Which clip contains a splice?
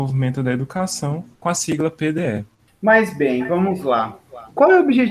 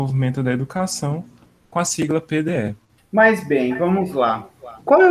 first; 1 cut; at 1.3 s

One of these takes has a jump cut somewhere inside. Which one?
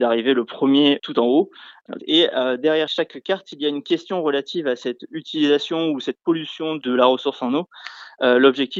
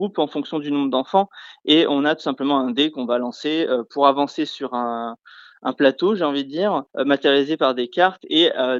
first; 1 cut; at 2.0 s

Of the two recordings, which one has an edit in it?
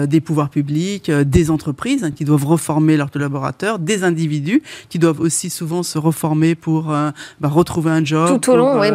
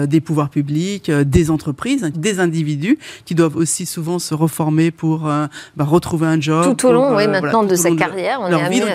second; 1 cut; at 2.1 s

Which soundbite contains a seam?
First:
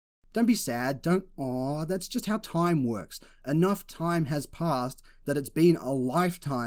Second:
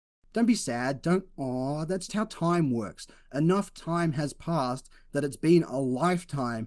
second; 1 cut; at 2.1 s

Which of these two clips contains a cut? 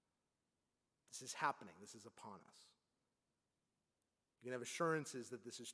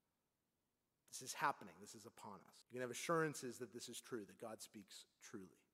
second; 1 cut; at 2.6 s

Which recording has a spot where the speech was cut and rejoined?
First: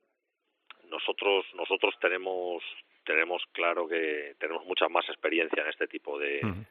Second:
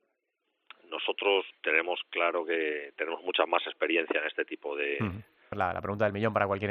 second; 2 cuts; at 1.5 s, 5.5 s

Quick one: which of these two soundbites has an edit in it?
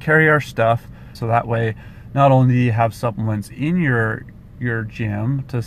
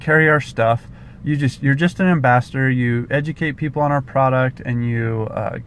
first; 1 cut; at 1.2 s

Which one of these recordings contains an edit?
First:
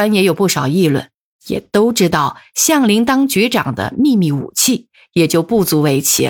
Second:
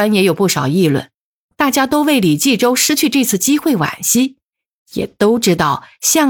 first; 1 cut; at 1.3 s

